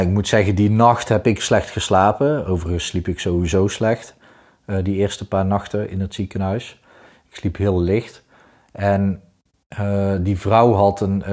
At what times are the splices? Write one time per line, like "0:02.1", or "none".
none